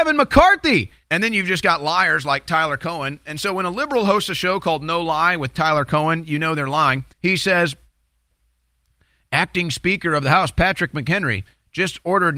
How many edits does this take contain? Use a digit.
2